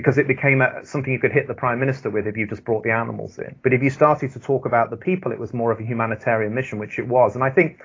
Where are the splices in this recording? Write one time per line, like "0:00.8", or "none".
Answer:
0:03.6